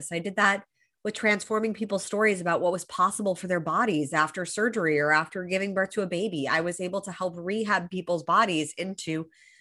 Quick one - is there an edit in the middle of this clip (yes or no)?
no